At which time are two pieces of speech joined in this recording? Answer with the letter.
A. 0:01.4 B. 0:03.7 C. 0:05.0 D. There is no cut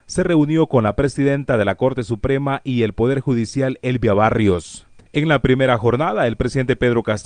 C